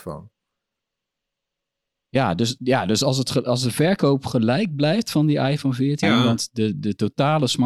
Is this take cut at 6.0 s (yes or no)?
yes